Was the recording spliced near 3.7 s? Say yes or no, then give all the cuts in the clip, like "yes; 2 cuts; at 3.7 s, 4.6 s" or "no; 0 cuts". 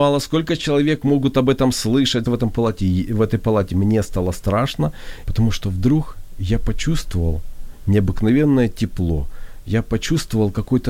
no; 2 cuts; at 2.3 s, 5.2 s